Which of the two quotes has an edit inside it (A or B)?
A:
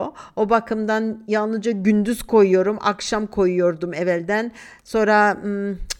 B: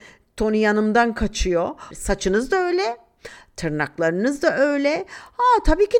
B